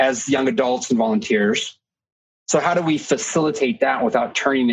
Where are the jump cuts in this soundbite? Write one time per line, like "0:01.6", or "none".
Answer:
0:02.3